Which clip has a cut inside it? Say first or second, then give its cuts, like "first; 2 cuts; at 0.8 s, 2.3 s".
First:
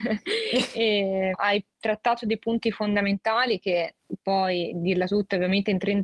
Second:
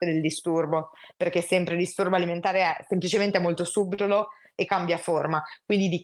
first; 1 cut; at 1.3 s